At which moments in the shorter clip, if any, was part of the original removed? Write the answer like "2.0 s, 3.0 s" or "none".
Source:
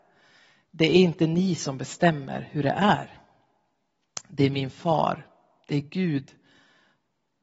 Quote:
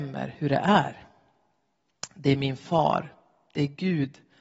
none